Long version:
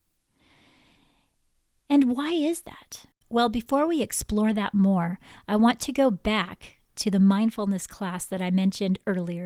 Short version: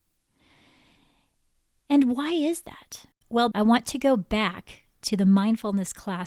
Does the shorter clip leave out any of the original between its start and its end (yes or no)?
yes